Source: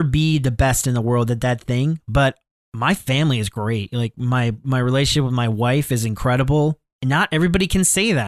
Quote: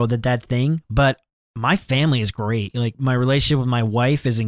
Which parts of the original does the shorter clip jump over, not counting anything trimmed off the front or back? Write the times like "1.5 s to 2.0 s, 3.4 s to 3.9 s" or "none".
4.1 s to 4.6 s